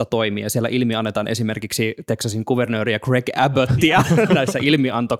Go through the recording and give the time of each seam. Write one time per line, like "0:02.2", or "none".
none